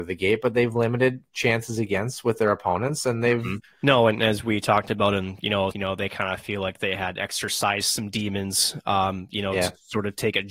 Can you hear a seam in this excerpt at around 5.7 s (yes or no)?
yes